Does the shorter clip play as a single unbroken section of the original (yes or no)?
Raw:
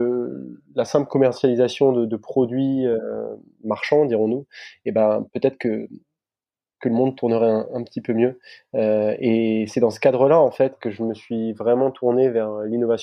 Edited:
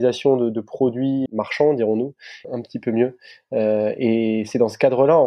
no